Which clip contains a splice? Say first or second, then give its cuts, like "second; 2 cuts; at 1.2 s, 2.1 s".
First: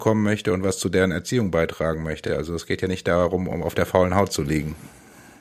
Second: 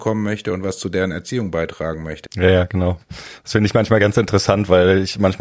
second; 1 cut; at 2.3 s